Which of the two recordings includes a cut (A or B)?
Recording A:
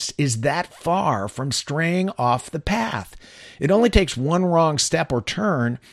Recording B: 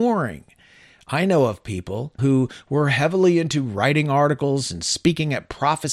B